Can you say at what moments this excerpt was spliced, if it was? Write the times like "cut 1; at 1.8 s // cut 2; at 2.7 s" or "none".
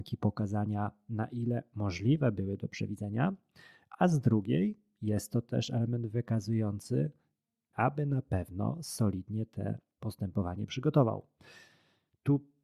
cut 1; at 7.7 s